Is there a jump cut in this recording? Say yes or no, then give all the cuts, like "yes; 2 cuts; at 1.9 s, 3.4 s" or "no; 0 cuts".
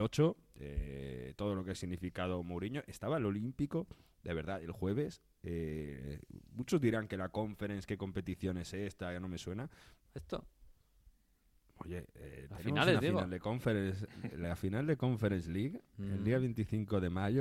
yes; 1 cut; at 10.1 s